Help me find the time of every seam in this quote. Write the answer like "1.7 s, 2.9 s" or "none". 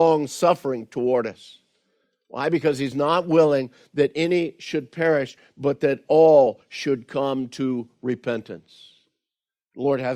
none